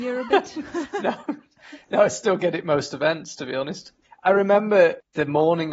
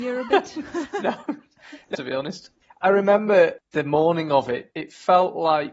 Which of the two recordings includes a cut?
second; 2 cuts; at 1.9 s, 4.7 s

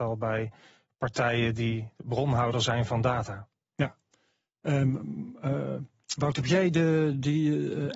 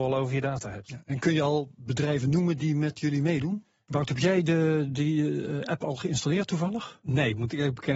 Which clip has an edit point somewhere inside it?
second; 1 cut; at 3.9 s

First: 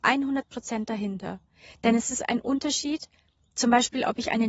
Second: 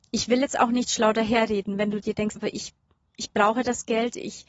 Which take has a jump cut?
second; 1 cut; at 2.4 s

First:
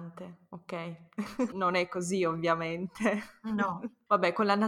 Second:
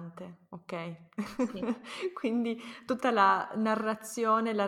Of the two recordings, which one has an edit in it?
first; 1 cut; at 1.5 s

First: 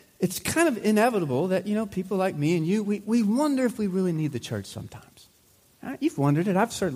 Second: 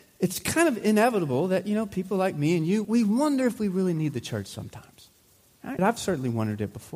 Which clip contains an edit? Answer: second; 2 cuts; at 2.8 s, 5.8 s

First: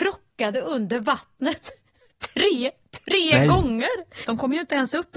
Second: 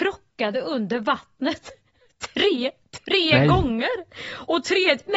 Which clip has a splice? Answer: first; 1 cut; at 4.2 s

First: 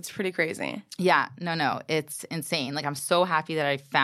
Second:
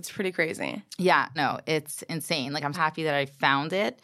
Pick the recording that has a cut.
second; 2 cuts; at 1.4 s, 2.7 s

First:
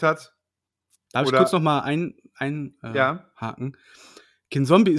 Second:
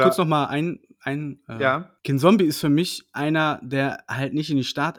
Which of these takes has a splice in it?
second; 1 cut; at 2.0 s

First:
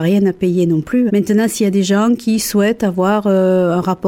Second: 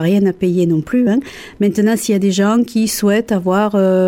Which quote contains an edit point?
first; 1 cut; at 1.1 s

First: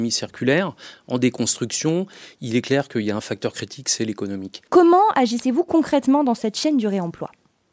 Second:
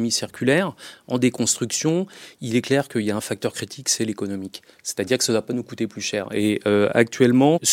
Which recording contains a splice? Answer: first; 1 cut; at 4.7 s

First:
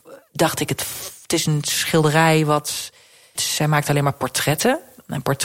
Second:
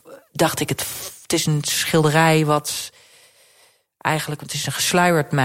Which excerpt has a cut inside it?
first; 1 cut; at 3.3 s

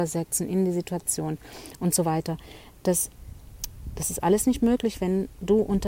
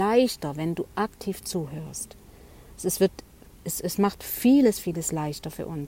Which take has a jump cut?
second; 1 cut; at 4.8 s

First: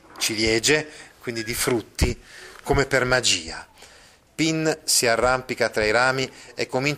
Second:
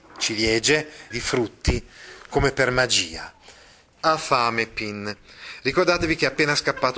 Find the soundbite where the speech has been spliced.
second; 2 cuts; at 1.1 s, 4.0 s

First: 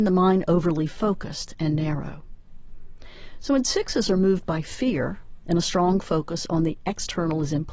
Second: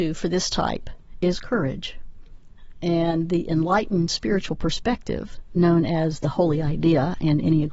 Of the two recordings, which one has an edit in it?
first; 1 cut; at 5.4 s

